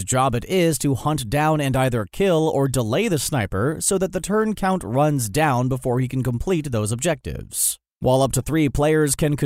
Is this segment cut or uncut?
uncut